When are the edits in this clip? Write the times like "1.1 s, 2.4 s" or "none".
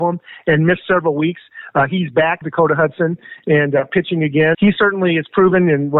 2.4 s, 4.5 s